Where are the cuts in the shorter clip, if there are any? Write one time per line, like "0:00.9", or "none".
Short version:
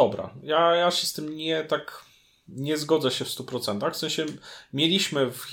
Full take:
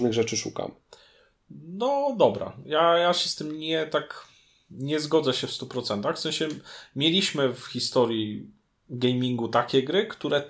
none